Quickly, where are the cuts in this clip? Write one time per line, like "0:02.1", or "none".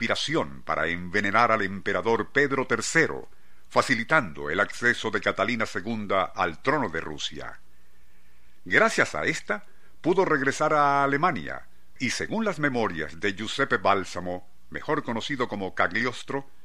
0:12.0